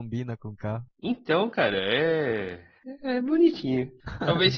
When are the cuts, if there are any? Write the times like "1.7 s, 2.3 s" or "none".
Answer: none